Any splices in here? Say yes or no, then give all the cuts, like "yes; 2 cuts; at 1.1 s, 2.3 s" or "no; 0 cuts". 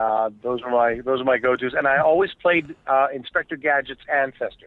no; 0 cuts